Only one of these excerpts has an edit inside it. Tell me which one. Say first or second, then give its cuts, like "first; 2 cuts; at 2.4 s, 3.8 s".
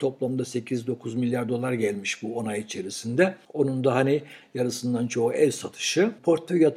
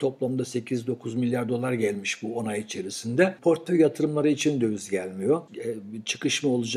second; 2 cuts; at 3.4 s, 5.5 s